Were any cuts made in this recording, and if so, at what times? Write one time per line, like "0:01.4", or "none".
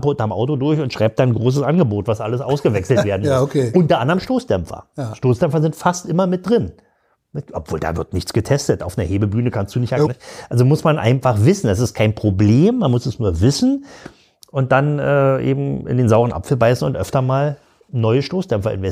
0:10.1